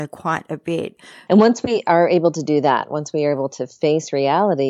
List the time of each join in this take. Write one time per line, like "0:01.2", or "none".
0:01.3